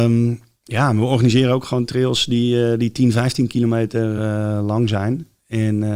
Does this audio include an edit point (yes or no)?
no